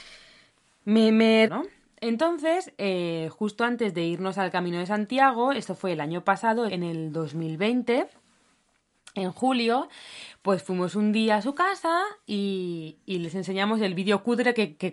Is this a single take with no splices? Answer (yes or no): no